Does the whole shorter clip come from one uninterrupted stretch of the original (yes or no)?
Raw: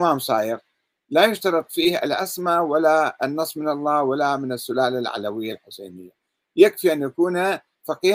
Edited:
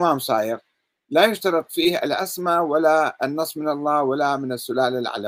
yes